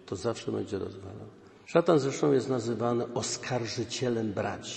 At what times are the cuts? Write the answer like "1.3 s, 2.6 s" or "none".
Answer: none